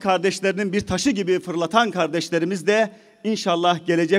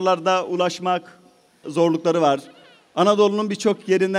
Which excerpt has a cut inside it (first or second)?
second